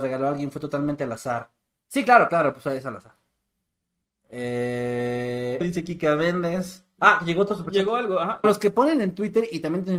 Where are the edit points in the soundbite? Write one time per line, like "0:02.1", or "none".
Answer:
0:05.6
0:07.0
0:08.4